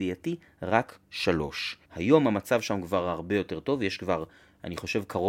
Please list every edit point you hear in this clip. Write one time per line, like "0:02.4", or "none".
0:01.8